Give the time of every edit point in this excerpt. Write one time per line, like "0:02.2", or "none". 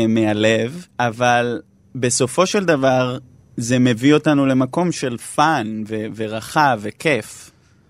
0:00.9